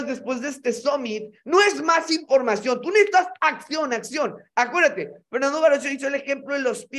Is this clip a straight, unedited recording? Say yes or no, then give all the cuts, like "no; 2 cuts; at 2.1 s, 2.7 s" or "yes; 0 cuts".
yes; 0 cuts